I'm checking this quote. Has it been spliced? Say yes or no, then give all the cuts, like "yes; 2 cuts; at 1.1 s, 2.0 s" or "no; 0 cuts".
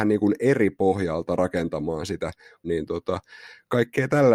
no; 0 cuts